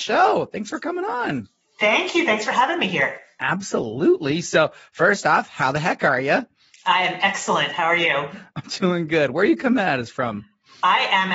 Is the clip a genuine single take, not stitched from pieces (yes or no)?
yes